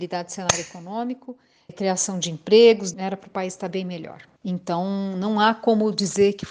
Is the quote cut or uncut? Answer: cut